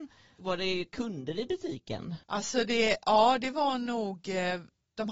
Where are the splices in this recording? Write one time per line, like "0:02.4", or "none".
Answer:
0:02.2